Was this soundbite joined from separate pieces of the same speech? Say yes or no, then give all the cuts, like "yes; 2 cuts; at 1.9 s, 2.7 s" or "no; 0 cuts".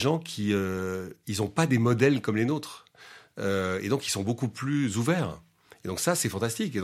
no; 0 cuts